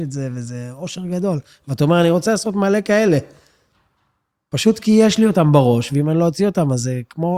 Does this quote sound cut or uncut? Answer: uncut